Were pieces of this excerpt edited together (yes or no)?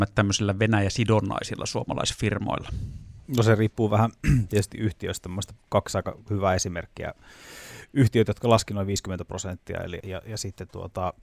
yes